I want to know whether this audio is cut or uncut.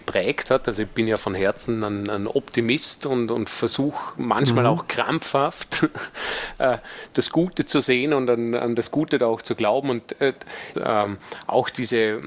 cut